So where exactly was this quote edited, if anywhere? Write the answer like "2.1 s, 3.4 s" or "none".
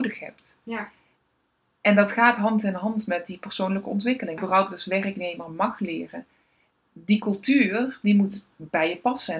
4.4 s